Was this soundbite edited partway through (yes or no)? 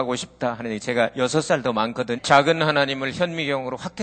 yes